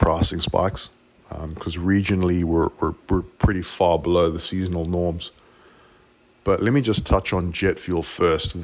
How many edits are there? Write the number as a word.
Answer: zero